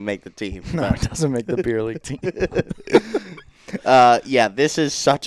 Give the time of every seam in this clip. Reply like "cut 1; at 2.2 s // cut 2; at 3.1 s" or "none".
none